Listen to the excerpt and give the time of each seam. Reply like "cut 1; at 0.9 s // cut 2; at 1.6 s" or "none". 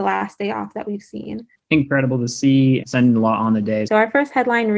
cut 1; at 2.8 s // cut 2; at 3.9 s